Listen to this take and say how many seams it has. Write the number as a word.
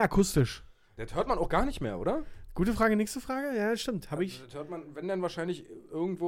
one